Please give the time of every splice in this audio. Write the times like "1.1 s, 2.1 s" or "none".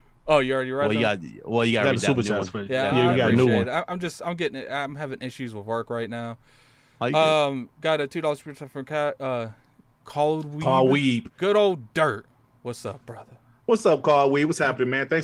11.4 s